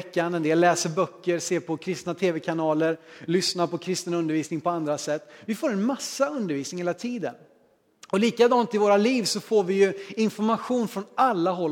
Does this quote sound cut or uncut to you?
uncut